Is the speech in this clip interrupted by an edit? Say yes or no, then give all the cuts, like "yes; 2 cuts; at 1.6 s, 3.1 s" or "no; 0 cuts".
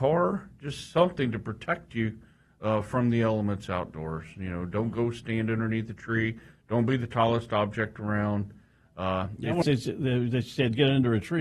yes; 1 cut; at 9.6 s